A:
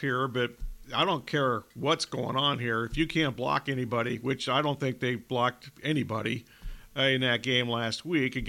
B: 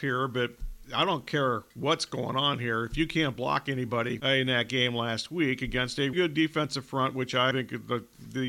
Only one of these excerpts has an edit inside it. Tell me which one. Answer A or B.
B